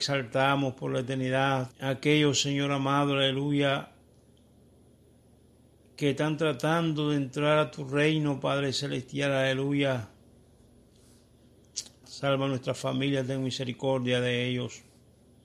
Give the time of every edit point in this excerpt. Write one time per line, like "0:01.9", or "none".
0:01.7
0:12.0